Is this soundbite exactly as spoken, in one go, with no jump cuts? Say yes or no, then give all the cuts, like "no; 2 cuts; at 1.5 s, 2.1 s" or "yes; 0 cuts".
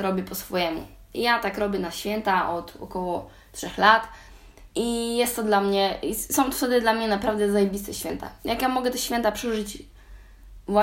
no; 1 cut; at 4.7 s